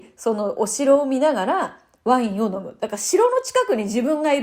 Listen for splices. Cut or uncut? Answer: uncut